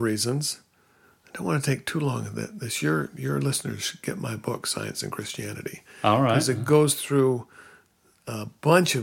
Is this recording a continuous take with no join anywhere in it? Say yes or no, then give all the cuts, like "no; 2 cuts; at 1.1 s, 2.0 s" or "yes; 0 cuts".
yes; 0 cuts